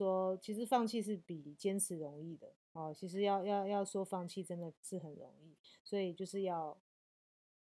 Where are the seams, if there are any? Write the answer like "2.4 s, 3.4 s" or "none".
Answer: 2.6 s